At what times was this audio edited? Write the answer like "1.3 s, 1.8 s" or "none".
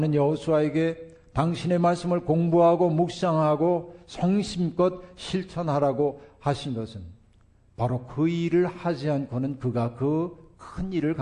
none